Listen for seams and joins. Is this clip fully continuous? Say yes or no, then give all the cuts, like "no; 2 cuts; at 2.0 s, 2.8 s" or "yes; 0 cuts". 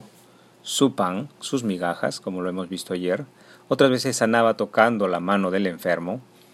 yes; 0 cuts